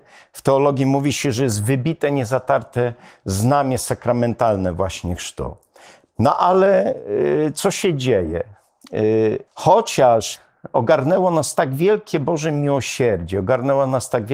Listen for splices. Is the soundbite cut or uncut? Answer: cut